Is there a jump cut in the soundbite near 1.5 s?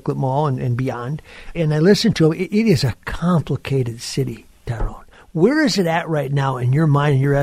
yes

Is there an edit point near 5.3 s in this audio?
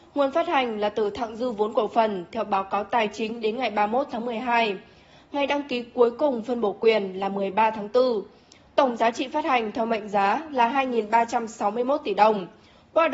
no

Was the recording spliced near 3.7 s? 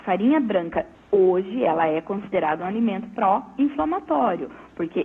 no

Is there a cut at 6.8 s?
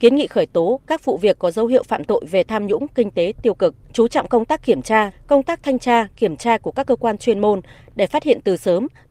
no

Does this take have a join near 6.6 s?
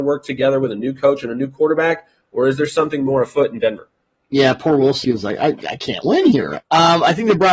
yes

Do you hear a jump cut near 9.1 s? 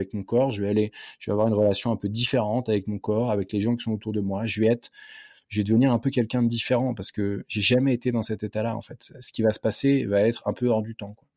no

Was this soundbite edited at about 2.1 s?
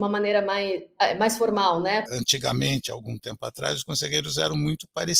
yes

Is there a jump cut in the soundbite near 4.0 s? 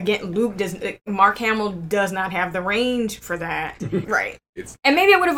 yes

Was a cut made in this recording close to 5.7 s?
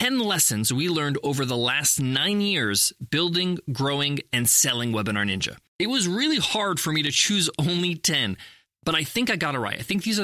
yes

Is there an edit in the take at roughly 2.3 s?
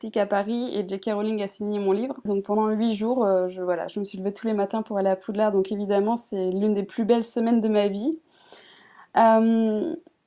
yes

